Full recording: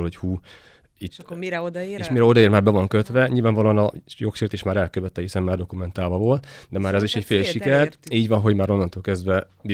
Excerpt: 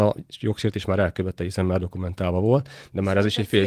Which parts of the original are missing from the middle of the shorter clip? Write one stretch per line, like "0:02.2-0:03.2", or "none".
none